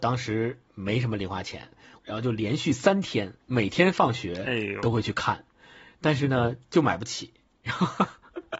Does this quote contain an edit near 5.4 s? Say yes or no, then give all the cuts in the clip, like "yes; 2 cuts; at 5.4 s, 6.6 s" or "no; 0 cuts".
no; 2 cuts; at 2.0 s, 3.4 s